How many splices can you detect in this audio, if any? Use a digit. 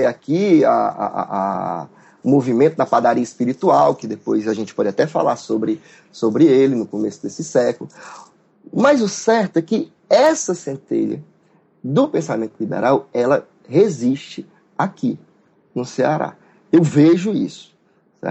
0